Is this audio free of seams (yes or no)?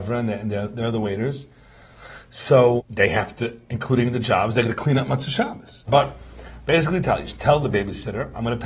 no